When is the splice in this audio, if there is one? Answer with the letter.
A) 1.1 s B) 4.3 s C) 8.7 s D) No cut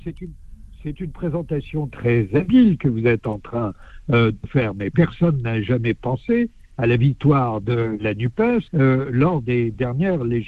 C